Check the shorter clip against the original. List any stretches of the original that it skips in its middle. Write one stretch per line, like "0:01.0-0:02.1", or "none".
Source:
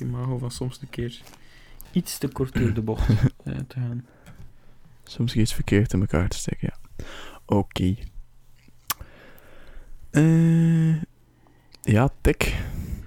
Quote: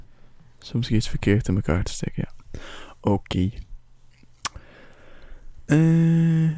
none